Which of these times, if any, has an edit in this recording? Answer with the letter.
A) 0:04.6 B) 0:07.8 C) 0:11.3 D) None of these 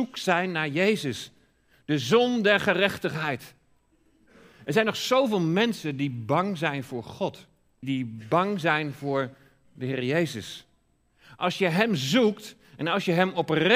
B